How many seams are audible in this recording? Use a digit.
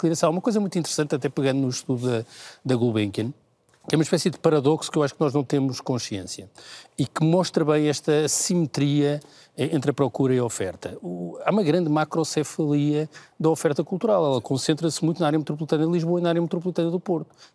0